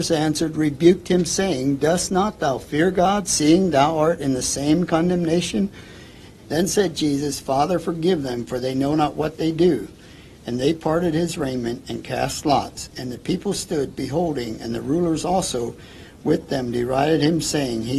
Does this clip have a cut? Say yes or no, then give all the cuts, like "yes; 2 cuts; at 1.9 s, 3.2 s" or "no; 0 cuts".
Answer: yes; 1 cut; at 6.4 s